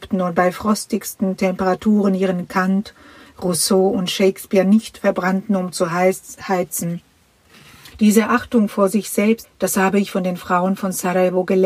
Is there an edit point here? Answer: yes; 2 cuts; at 7.9 s, 9.4 s

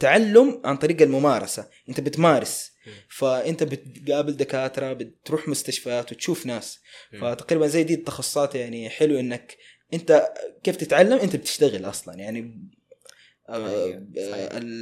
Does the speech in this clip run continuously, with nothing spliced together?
yes; 0 cuts

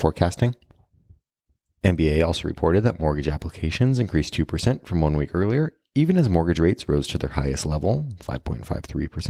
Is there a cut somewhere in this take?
no; 0 cuts

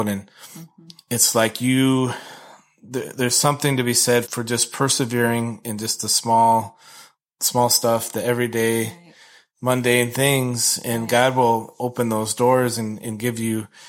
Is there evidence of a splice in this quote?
yes; 1 cut; at 4.2 s

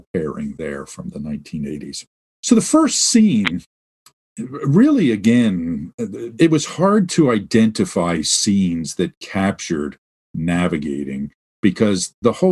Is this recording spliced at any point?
no; 0 cuts

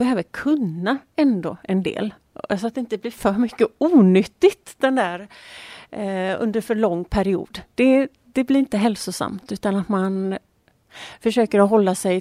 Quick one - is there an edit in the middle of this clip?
no; 0 cuts

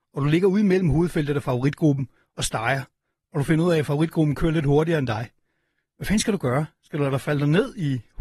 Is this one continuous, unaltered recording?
yes; 0 cuts

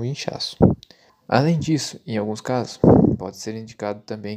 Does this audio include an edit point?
yes; 1 cut; at 1.1 s

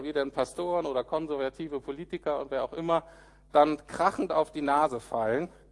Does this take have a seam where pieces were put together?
no; 0 cuts

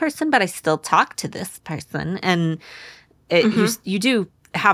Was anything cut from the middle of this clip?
no; 0 cuts

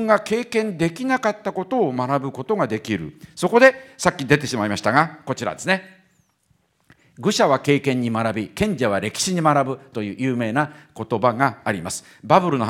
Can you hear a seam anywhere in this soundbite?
no; 0 cuts

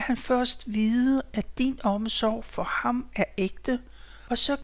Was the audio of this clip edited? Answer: no; 0 cuts

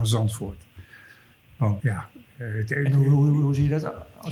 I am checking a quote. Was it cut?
yes; 1 cut; at 1.8 s

